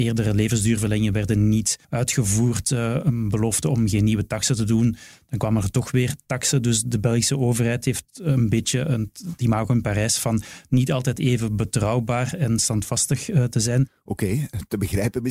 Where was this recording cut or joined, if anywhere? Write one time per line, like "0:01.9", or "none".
0:01.8